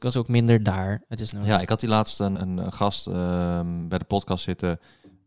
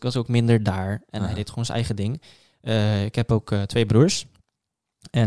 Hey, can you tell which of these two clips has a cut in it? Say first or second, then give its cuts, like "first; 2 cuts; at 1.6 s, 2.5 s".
first; 2 cuts; at 1.1 s, 2.4 s